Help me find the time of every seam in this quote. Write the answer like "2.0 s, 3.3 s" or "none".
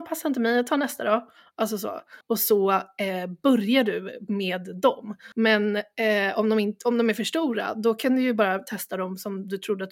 2.2 s, 5.3 s

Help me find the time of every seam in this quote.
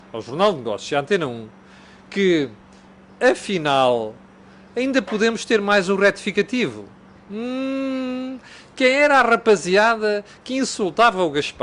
none

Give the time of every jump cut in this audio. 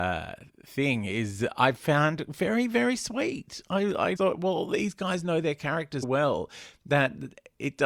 4.2 s, 6.0 s

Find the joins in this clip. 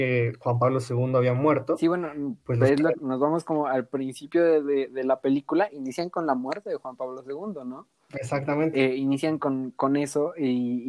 2.9 s

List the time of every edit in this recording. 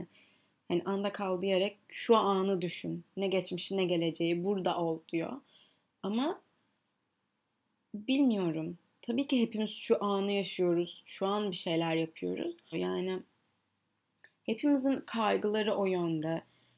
12.7 s

